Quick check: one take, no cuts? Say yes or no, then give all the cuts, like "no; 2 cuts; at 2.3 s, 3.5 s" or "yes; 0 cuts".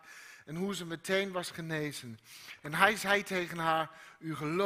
yes; 0 cuts